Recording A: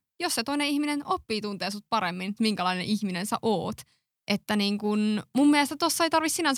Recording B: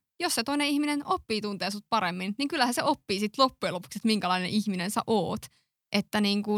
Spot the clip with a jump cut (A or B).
A